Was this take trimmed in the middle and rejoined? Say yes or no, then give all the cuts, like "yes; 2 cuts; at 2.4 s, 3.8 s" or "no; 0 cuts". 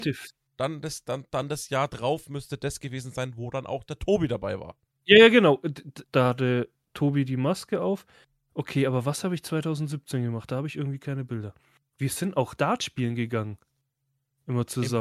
yes; 2 cuts; at 6.0 s, 11.8 s